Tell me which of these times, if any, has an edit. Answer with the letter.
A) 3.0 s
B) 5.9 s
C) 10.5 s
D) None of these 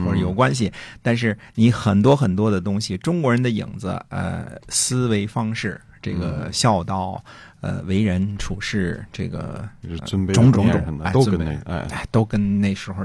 C